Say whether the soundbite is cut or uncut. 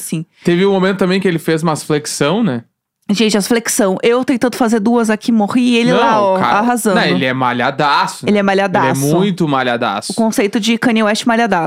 uncut